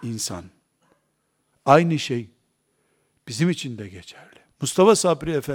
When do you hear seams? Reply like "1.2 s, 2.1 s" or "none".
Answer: 1.5 s

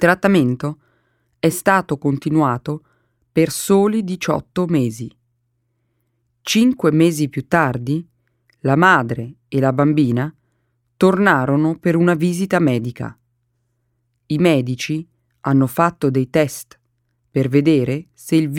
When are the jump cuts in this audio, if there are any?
none

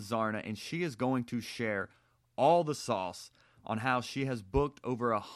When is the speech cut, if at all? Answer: none

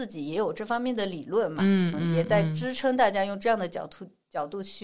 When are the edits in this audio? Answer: 1.9 s

